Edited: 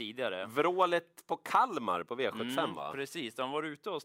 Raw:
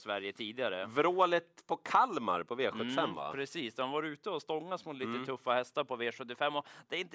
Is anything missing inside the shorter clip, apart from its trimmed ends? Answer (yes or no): no